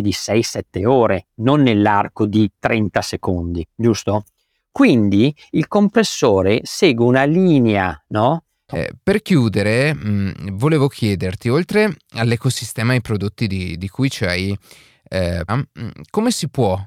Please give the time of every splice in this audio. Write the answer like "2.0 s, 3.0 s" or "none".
8.7 s, 15.5 s